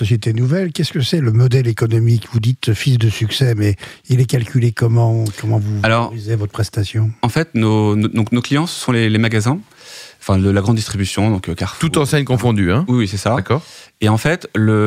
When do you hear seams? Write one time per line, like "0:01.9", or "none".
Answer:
none